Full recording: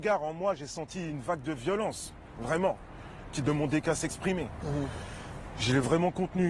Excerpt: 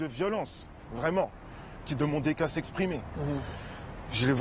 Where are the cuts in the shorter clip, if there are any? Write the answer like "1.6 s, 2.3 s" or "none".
none